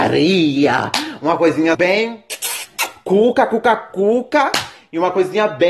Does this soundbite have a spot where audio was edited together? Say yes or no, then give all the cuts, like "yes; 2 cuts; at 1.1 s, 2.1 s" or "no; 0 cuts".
yes; 1 cut; at 1.7 s